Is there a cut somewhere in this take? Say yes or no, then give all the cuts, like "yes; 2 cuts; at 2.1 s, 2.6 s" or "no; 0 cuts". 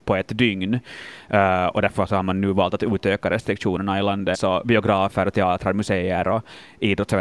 yes; 1 cut; at 4.3 s